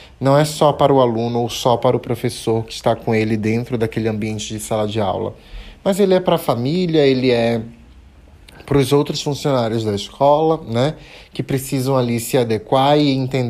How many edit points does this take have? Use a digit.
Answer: 0